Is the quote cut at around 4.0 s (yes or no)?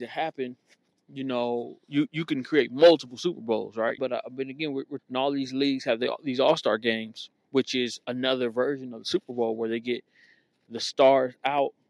yes